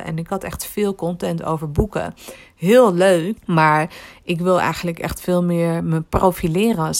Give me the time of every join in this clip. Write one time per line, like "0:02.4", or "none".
0:03.4